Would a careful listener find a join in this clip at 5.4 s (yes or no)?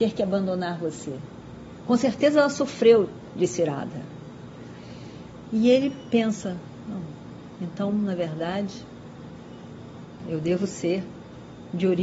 yes